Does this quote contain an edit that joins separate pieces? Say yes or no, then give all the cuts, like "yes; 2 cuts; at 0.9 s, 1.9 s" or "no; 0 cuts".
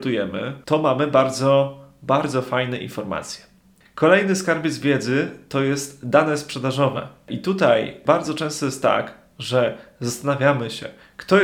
yes; 1 cut; at 3.8 s